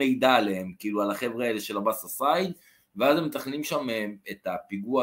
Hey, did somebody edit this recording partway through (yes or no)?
no